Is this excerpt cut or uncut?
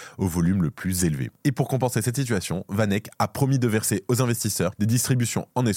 uncut